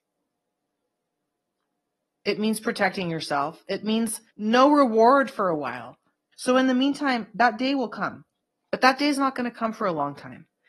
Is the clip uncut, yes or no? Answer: no